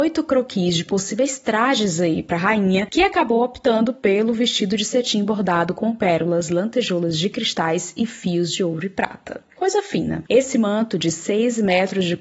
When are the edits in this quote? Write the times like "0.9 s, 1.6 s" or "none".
10.3 s